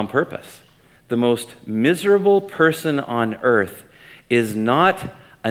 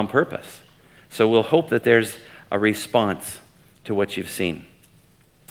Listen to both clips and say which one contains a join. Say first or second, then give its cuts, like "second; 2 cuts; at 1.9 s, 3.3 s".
first; 1 cut; at 1.0 s